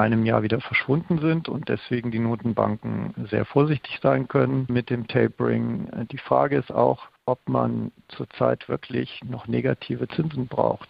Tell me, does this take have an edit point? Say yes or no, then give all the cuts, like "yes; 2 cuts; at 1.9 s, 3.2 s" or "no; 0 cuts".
yes; 1 cut; at 6.1 s